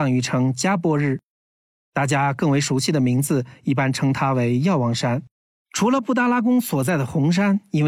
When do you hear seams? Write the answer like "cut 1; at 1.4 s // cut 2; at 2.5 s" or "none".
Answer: cut 1; at 5.5 s